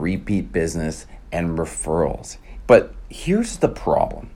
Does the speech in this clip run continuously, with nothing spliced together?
no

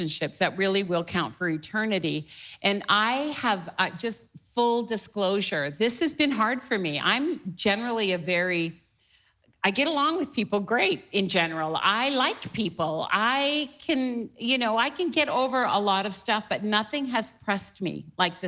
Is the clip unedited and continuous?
yes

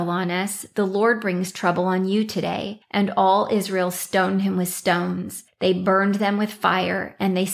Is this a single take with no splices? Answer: yes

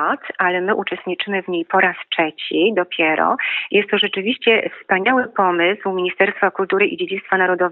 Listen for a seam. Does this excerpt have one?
no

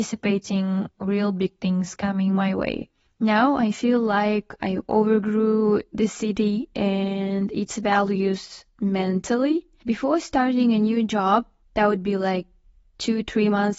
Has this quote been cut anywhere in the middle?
no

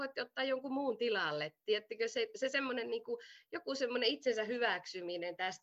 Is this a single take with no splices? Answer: yes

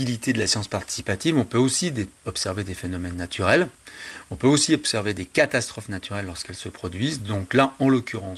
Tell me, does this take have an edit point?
no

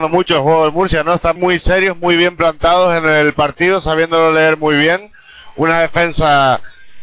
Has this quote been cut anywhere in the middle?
yes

